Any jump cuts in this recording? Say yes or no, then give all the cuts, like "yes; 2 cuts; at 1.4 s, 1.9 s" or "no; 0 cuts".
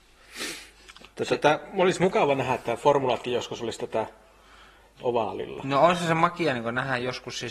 no; 0 cuts